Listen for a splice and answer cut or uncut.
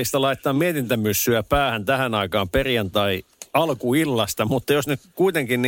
uncut